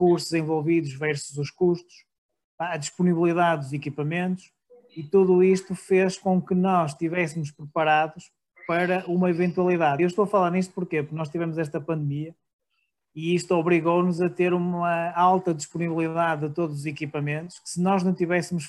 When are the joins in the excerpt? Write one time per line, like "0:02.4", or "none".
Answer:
none

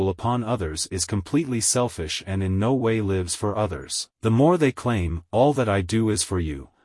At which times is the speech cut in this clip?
0:04.1

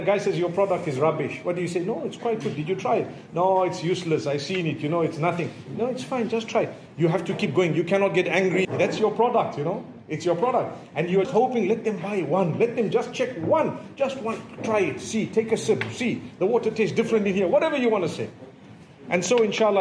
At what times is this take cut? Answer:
0:08.6
0:11.2

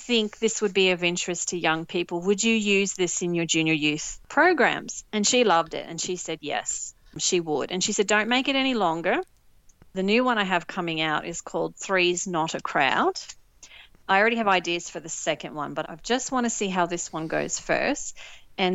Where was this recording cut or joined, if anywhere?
0:05.1
0:15.8

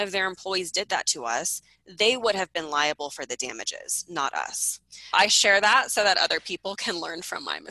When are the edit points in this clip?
0:05.1

